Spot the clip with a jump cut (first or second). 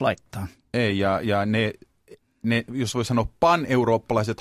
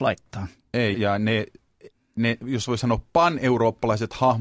second